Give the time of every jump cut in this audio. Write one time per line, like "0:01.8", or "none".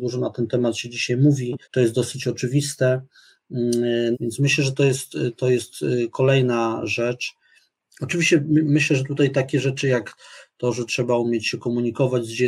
0:01.6
0:04.1